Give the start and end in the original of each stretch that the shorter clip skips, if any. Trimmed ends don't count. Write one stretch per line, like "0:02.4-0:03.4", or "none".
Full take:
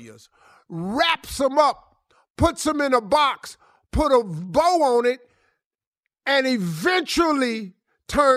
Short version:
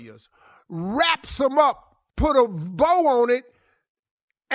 0:02.1-0:03.9